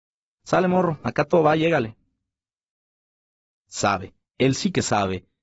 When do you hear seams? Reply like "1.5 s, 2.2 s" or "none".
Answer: 3.6 s

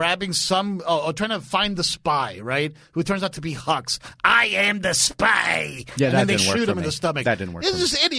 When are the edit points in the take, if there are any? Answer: none

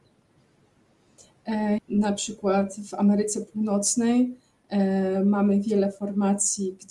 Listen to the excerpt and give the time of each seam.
1.8 s

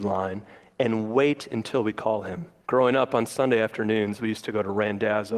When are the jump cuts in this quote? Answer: 2.6 s

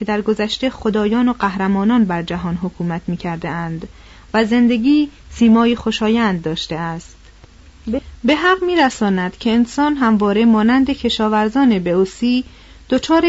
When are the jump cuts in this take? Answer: none

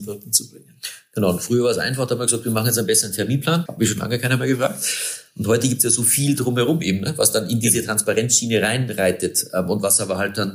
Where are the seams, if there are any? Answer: 3.7 s

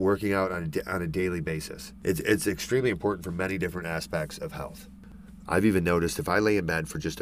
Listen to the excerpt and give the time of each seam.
5.5 s

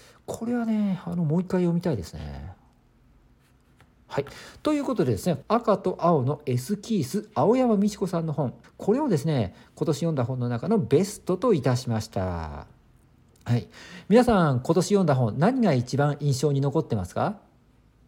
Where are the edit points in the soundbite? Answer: 5.4 s, 8.6 s

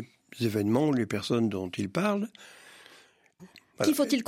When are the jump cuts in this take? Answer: 3.4 s

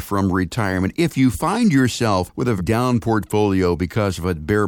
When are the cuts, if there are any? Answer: 2.6 s

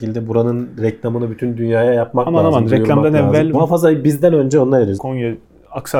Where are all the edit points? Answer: 3.5 s, 5.0 s

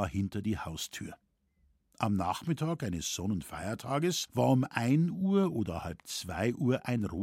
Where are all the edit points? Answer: none

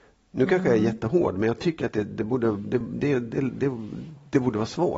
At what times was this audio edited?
none

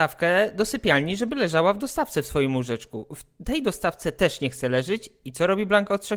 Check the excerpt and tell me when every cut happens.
none

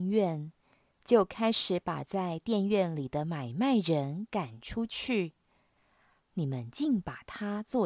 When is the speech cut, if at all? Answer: 6.2 s

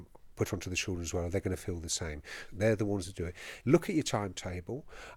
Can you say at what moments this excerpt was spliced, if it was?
2.5 s, 3.6 s

